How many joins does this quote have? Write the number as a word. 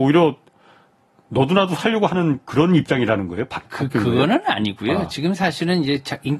one